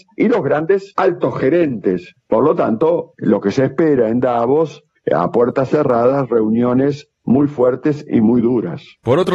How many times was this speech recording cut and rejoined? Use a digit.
0